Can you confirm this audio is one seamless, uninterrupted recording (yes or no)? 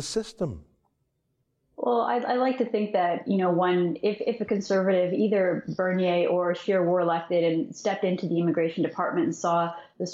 yes